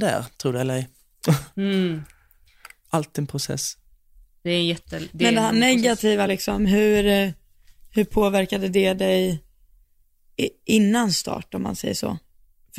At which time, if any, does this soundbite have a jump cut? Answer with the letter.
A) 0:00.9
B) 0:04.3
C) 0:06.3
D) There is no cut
D